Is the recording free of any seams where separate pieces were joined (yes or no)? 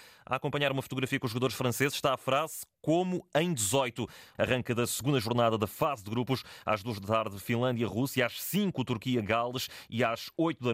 no